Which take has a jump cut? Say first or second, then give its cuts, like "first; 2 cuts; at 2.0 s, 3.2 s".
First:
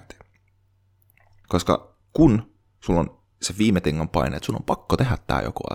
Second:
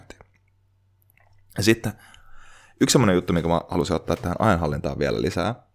first; 1 cut; at 1.4 s